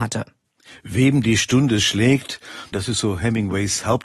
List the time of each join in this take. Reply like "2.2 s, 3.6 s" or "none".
2.7 s

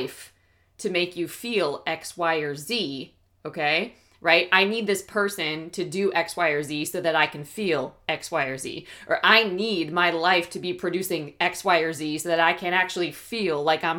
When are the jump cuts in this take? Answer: none

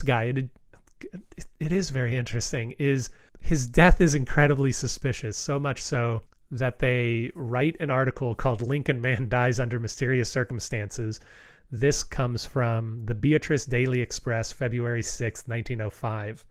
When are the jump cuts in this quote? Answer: none

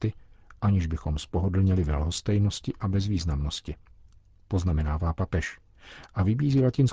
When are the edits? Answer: none

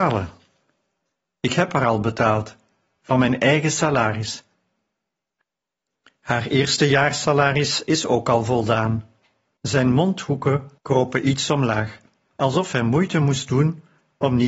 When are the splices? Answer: 9.6 s, 10.8 s

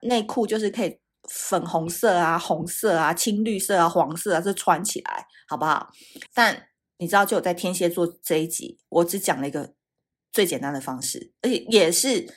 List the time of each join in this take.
6.3 s

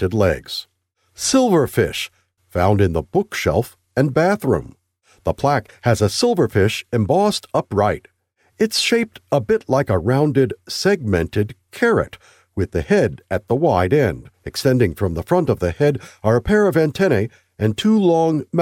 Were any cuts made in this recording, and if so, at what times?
14.3 s

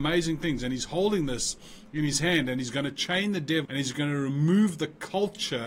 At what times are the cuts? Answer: 3.7 s

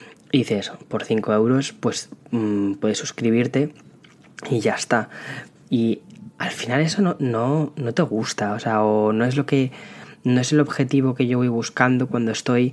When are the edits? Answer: 5.6 s

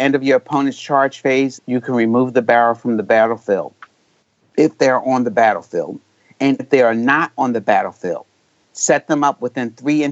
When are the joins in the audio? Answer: 1.6 s, 6.6 s

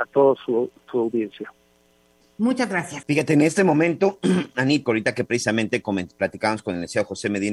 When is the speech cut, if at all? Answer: 3.0 s, 4.8 s

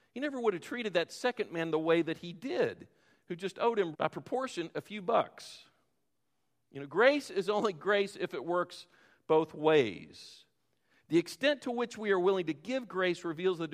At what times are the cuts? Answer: 3.9 s

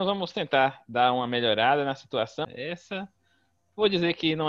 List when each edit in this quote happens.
2.4 s

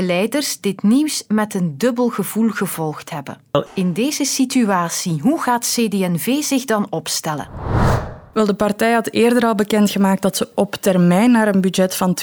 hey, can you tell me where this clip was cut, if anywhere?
3.7 s

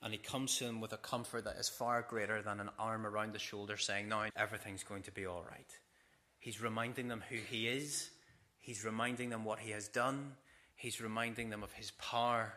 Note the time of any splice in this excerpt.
4.3 s

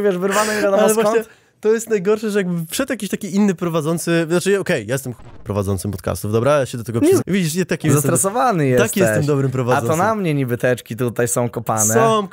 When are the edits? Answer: 7.2 s

